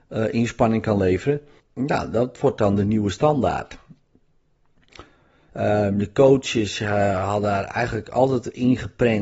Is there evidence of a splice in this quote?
yes; 2 cuts; at 1.6 s, 5.5 s

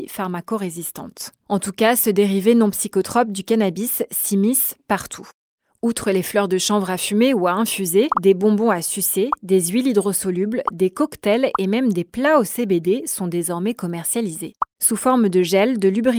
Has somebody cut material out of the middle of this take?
yes; 1 cut; at 8.1 s

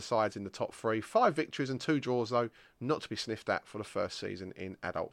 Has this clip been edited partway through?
no; 0 cuts

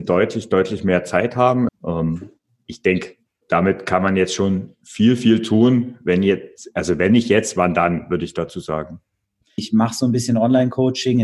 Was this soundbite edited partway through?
yes; 2 cuts; at 1.7 s, 9.6 s

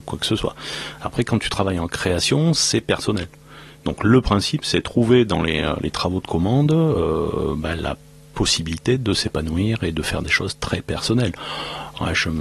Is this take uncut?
yes; 0 cuts

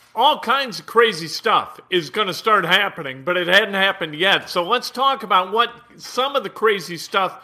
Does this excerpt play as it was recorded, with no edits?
yes; 0 cuts

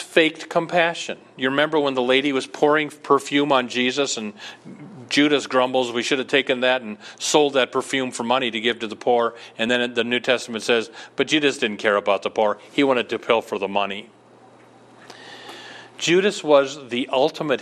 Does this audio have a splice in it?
no; 0 cuts

